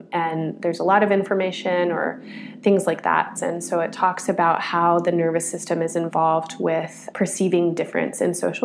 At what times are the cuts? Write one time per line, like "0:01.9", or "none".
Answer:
0:03.3
0:07.1